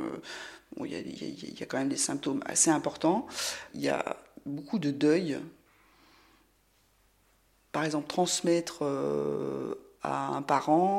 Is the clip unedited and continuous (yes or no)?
yes